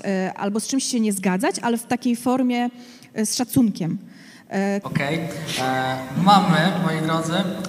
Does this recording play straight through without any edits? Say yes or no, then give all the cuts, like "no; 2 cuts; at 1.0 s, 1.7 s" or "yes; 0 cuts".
no; 2 cuts; at 4.8 s, 6.2 s